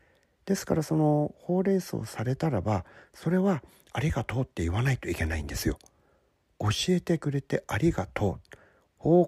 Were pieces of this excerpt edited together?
no; 0 cuts

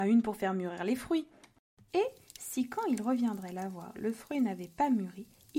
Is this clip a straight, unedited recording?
no; 1 cut; at 1.9 s

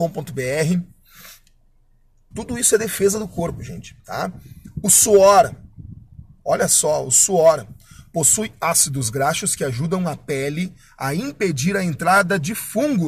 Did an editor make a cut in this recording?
yes; 1 cut; at 2.3 s

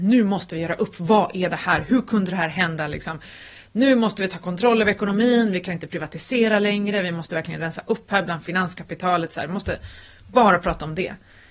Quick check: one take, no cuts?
yes; 0 cuts

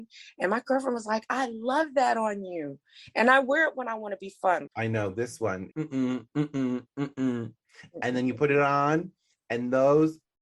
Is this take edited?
yes; 2 cuts; at 4.7 s, 5.7 s

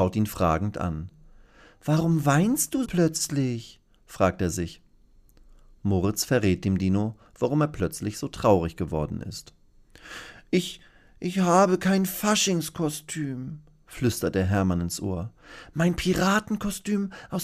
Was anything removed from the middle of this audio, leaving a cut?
yes; 1 cut; at 2.8 s

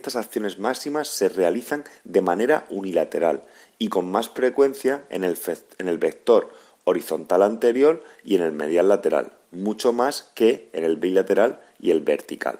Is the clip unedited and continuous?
yes; 0 cuts

